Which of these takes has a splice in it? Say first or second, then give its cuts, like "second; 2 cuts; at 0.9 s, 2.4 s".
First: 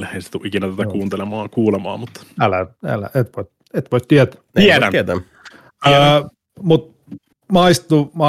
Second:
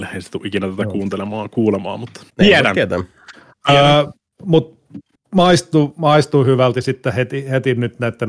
second; 1 cut; at 2.3 s